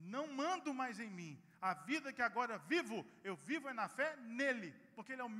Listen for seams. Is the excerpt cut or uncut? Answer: uncut